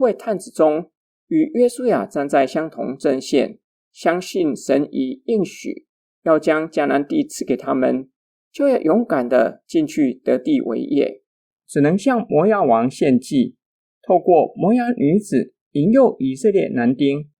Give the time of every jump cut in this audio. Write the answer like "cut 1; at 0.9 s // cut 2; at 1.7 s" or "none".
cut 1; at 11.5 s